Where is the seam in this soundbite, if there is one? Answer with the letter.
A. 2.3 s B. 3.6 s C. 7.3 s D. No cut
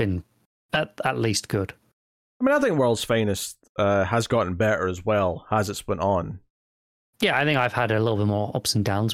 D